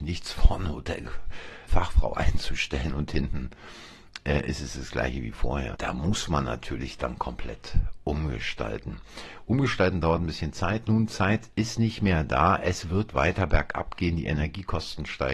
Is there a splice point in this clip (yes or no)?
yes